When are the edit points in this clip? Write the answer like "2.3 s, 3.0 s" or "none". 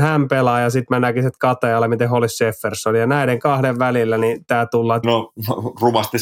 5.0 s